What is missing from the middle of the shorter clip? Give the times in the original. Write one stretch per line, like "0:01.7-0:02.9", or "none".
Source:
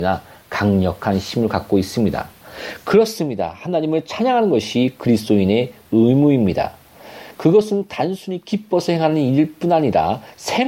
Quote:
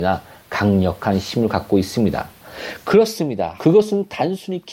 0:03.6-0:07.4